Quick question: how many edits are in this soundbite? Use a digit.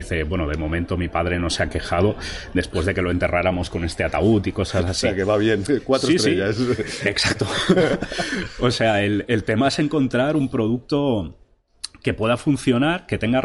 0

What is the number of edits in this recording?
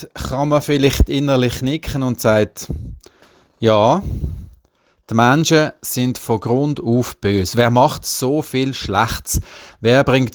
0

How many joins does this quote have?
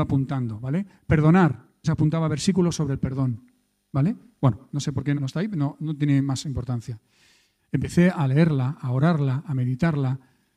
3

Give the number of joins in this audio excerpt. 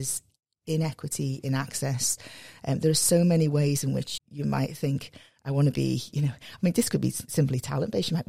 1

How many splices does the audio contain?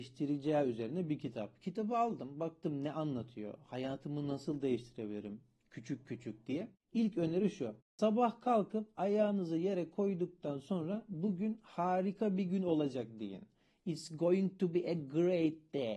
0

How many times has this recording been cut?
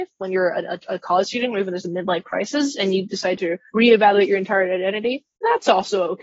1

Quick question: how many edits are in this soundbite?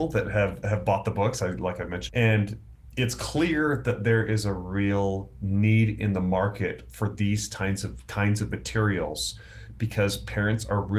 1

